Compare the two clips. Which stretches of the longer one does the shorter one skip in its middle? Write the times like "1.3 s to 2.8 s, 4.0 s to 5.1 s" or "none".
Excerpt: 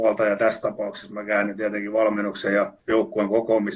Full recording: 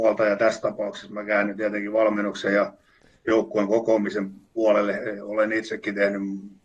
2.8 s to 3.2 s